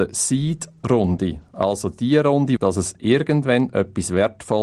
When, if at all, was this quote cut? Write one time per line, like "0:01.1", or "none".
0:02.6